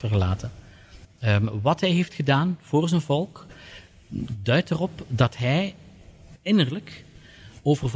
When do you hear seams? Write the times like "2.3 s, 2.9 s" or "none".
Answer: 1.0 s